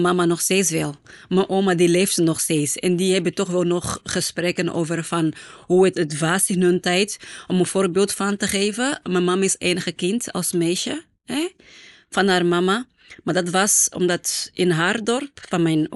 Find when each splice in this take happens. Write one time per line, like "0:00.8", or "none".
0:05.9